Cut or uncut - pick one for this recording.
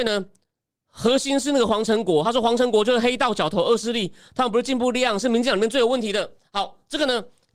uncut